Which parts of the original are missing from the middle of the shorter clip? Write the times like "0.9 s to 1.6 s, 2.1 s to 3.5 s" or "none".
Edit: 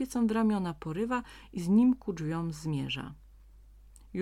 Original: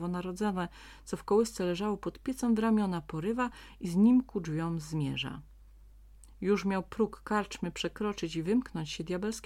none

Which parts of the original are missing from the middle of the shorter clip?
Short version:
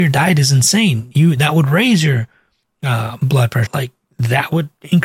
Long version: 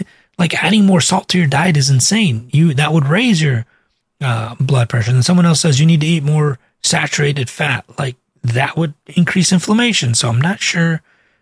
5.0 s to 7.9 s

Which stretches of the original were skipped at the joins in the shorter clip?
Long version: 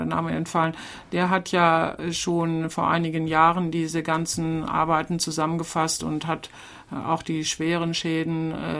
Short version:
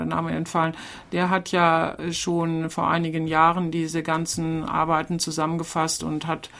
none

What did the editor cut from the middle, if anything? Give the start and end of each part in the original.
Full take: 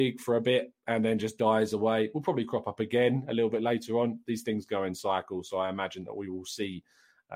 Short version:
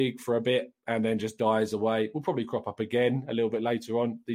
none

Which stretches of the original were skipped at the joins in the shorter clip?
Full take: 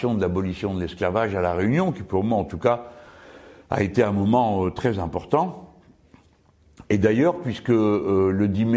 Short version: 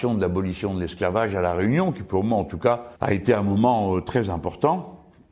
3.0 s to 3.6 s

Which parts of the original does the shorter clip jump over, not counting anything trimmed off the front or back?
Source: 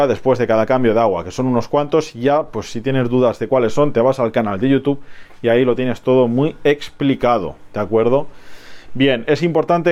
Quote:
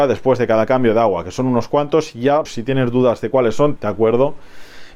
2.4 s to 2.6 s, 3.9 s to 7.7 s

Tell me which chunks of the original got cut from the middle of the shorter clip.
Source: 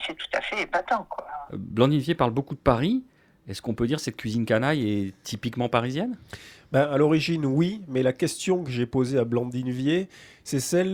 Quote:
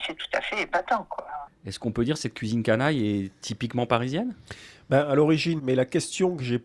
1.5 s to 3.3 s, 7.4 s to 7.9 s

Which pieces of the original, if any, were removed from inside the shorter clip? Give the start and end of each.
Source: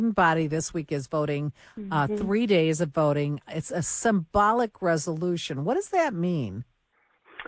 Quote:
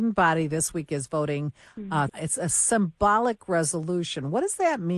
2.1 s to 3.4 s

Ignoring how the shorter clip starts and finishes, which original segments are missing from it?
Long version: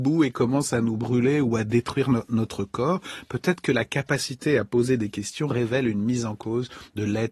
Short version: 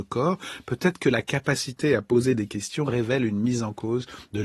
none

